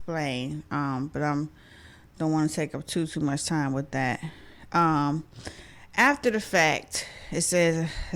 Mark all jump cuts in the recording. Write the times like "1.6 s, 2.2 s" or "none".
none